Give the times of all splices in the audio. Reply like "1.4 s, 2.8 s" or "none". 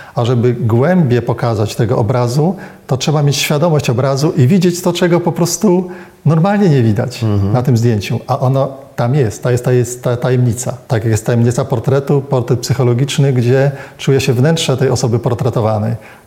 10.8 s